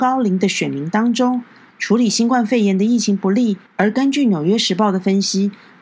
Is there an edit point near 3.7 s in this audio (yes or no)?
yes